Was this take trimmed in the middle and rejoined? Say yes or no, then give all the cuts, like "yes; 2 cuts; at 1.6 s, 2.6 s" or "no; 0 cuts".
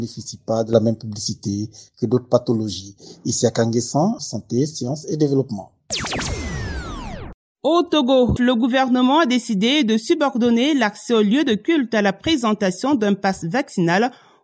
yes; 2 cuts; at 4.2 s, 8.4 s